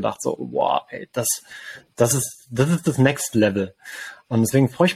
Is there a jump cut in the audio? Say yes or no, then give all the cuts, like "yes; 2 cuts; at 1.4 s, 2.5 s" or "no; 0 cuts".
no; 0 cuts